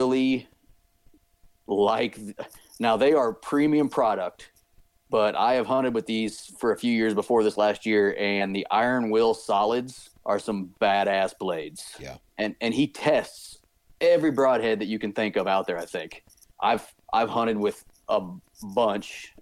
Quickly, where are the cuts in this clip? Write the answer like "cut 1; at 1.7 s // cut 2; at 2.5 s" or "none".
cut 1; at 10.2 s // cut 2; at 12.2 s // cut 3; at 16.5 s